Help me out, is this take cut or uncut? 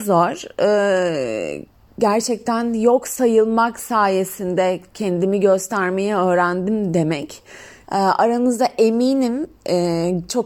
cut